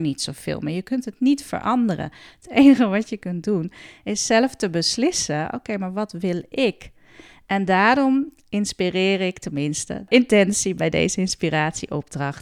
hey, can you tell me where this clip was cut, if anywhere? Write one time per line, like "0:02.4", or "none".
0:10.1